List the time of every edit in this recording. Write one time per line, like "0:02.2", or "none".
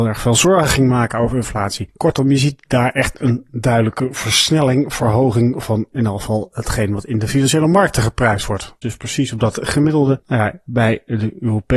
0:08.8